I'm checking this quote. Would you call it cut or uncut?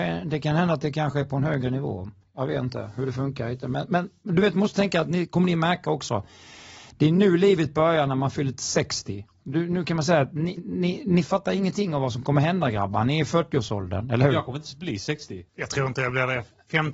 cut